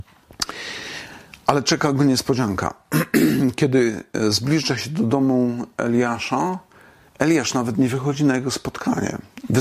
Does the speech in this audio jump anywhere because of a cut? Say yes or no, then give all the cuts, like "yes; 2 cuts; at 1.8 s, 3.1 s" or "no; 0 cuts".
no; 0 cuts